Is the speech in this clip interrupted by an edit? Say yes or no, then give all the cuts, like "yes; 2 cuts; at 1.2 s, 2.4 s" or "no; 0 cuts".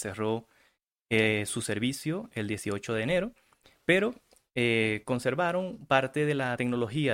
no; 0 cuts